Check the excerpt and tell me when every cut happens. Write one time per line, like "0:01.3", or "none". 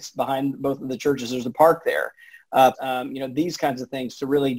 0:02.7